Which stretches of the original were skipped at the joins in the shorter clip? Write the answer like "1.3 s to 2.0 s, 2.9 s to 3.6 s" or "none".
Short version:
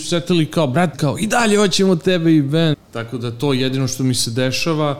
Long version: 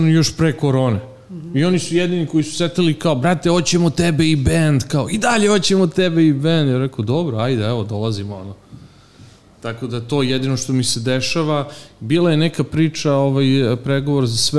3.4 s to 4.8 s, 6.6 s to 9.4 s